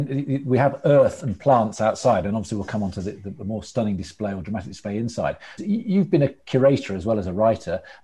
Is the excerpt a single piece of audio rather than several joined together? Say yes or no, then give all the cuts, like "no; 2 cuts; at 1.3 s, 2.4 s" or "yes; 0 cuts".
no; 1 cut; at 5.6 s